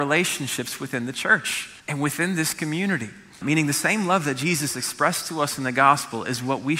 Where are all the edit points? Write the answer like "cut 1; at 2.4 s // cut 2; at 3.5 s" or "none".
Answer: cut 1; at 1.8 s // cut 2; at 3.4 s

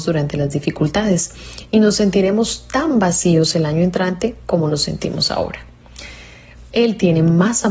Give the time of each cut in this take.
cut 1; at 6.7 s

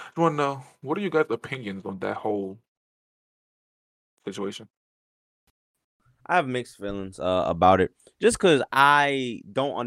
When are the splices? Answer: none

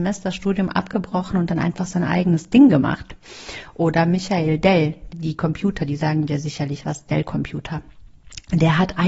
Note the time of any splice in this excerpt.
cut 1; at 5.1 s

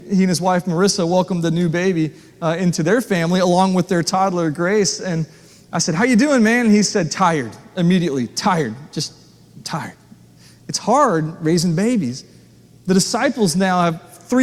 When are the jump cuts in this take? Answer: none

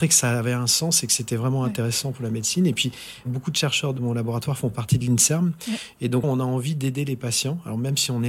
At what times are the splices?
cut 1; at 6.2 s

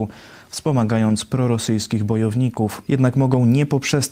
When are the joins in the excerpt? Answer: cut 1; at 2.9 s

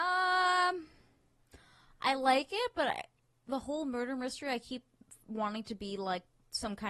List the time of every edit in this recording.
none

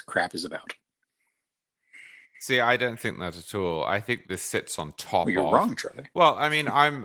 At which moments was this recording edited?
none

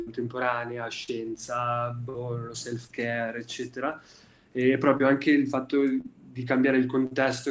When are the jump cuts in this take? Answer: cut 1; at 2.5 s

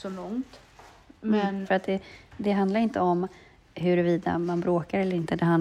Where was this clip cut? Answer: cut 1; at 1.6 s

